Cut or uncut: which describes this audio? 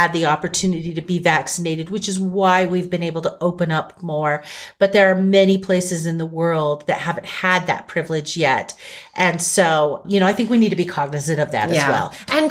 cut